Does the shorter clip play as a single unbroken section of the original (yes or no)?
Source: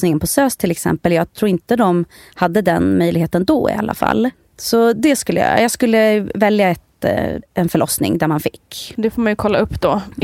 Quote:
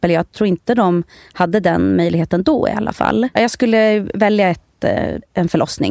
no